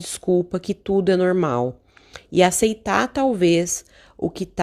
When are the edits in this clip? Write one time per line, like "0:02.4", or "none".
none

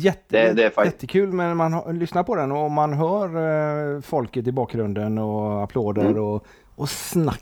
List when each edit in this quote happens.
none

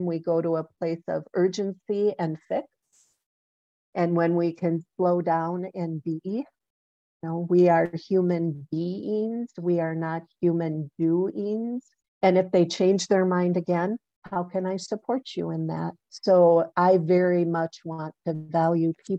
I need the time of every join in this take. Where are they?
0:12.0
0:16.1

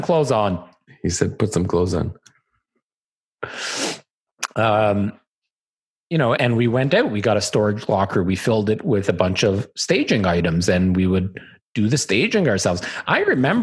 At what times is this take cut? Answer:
0:06.4

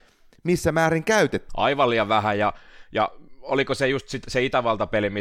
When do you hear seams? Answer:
0:01.5

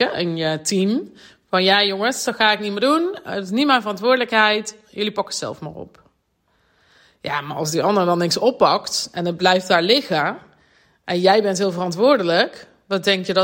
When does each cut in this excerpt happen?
0:02.2

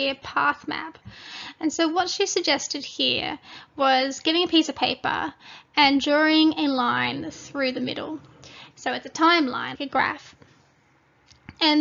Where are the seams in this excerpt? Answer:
0:08.7
0:09.7

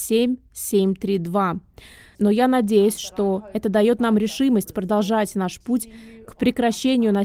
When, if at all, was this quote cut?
0:02.1

